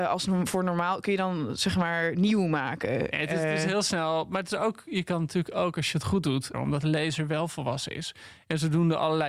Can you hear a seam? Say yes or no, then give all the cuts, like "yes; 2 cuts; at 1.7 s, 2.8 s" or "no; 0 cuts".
yes; 1 cut; at 6.5 s